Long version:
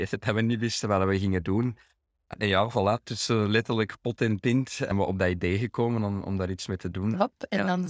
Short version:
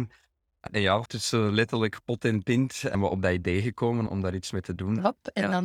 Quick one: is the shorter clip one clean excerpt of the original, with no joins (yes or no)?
no